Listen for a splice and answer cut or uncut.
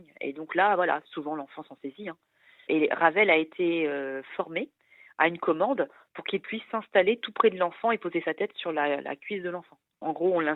uncut